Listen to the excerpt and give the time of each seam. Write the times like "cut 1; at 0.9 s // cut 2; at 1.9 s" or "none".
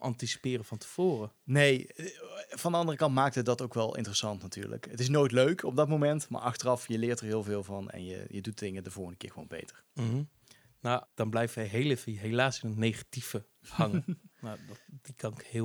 cut 1; at 11.0 s // cut 2; at 14.3 s